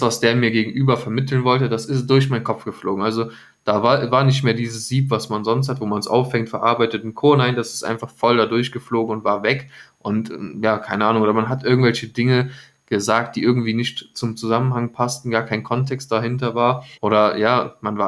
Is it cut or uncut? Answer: cut